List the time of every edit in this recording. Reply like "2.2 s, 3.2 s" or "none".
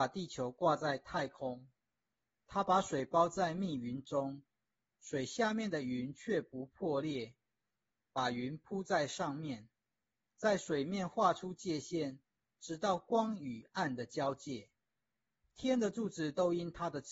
7.9 s